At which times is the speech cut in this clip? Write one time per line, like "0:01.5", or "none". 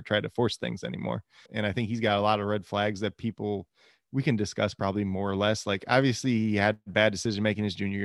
0:01.5